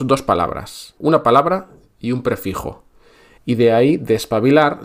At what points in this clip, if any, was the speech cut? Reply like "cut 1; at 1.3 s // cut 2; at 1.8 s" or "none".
cut 1; at 1.0 s // cut 2; at 3.4 s